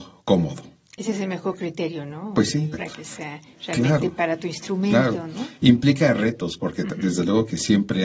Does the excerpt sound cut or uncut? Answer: cut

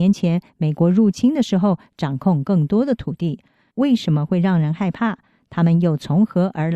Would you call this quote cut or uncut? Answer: cut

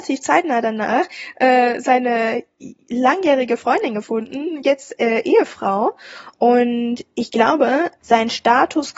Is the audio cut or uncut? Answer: cut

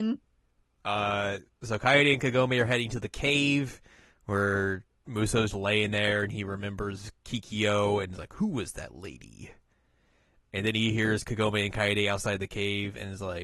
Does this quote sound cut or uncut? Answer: cut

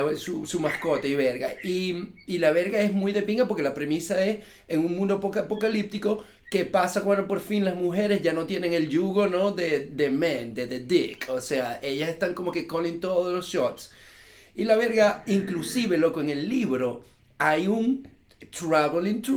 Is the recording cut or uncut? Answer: uncut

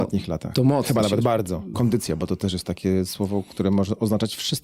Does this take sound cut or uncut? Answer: cut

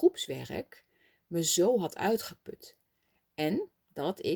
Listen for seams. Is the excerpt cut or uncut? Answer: uncut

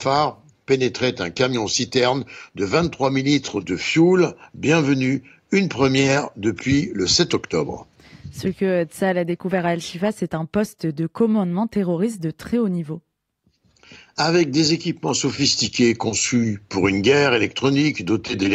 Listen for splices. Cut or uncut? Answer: uncut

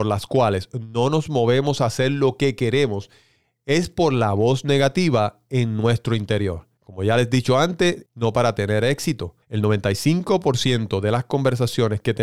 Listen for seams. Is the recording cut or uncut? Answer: cut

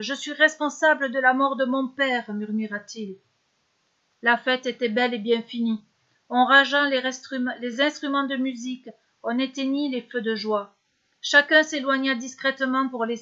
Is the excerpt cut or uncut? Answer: uncut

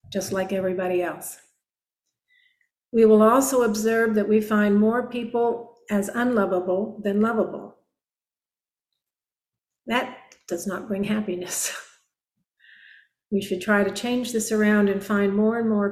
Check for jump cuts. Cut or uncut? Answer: uncut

